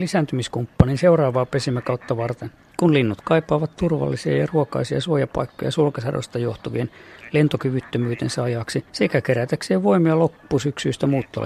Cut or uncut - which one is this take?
cut